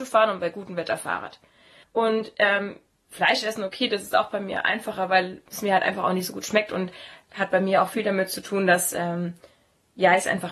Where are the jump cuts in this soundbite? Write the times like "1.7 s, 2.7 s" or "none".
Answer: none